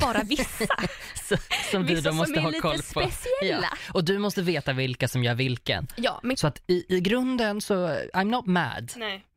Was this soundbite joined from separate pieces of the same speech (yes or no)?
yes